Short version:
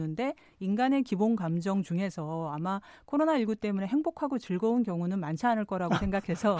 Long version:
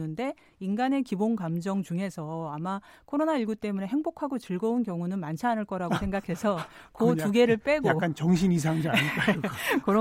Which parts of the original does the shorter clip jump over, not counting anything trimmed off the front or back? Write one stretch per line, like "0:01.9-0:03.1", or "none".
none